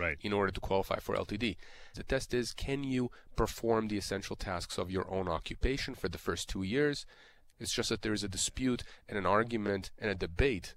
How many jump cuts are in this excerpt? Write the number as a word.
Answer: two